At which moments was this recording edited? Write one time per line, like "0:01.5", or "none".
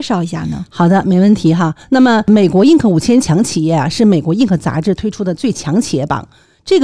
none